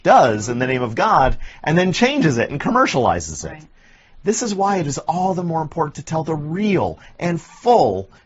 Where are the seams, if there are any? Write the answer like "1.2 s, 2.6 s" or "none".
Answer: none

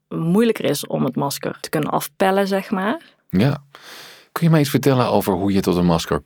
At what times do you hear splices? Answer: none

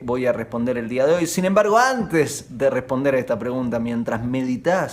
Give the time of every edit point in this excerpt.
none

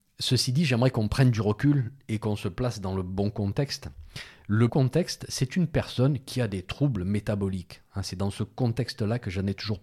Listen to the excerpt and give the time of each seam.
4.7 s

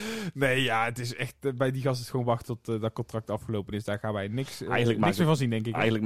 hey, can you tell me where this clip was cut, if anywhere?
none

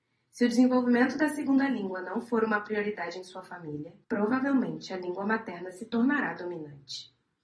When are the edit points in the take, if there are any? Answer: 4.0 s

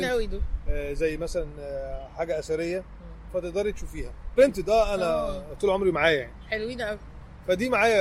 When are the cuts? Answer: 4.4 s

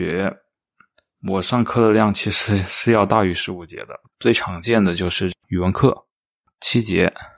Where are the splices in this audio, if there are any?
4.1 s

